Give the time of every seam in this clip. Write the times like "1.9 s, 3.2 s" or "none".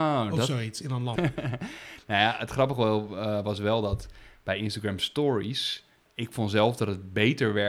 1.2 s, 6.1 s